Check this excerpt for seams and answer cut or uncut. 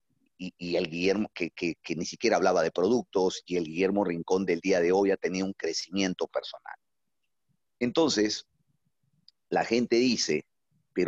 uncut